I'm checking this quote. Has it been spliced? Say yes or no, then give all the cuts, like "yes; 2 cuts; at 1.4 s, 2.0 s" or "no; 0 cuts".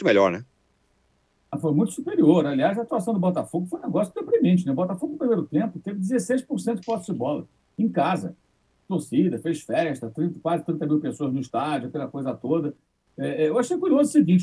no; 0 cuts